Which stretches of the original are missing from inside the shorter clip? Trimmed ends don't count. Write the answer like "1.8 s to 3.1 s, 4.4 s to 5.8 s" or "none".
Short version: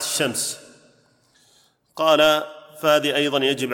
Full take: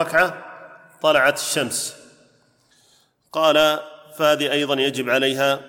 none